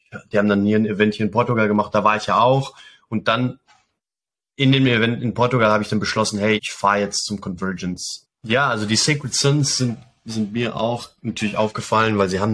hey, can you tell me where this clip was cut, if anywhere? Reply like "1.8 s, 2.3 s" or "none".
6.6 s, 8.2 s